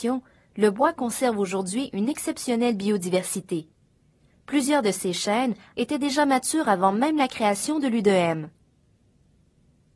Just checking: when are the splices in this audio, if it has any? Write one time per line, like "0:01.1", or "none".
0:05.7